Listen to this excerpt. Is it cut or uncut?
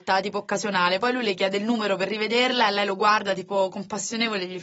uncut